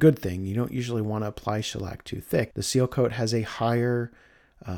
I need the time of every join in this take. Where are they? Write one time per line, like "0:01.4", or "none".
0:02.5